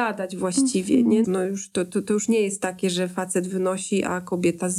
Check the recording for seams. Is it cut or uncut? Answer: cut